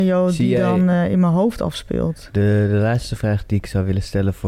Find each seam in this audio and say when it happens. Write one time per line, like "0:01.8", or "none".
none